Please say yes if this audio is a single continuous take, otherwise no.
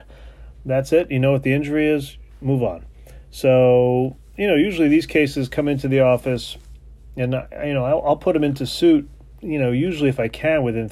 yes